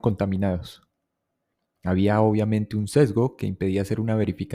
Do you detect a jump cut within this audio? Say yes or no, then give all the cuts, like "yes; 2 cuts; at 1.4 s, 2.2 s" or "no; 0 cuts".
no; 0 cuts